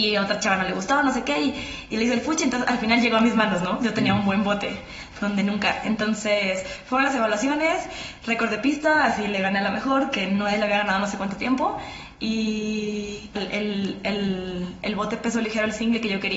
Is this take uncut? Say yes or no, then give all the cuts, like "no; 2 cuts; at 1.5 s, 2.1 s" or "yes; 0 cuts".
no; 1 cut; at 13.3 s